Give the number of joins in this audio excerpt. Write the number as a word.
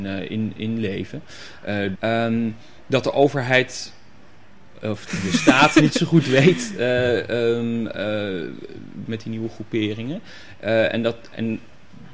two